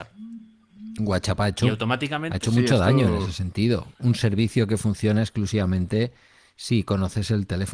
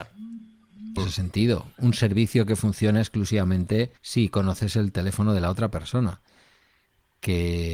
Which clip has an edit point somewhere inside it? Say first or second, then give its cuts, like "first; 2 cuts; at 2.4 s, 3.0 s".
second; 2 cuts; at 1.0 s, 4.0 s